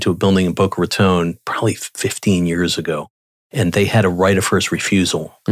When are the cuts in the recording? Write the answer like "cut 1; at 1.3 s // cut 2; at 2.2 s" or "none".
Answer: none